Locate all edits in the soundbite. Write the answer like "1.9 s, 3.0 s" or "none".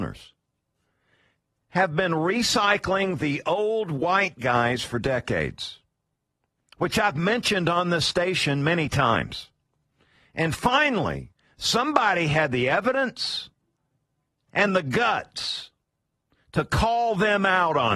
none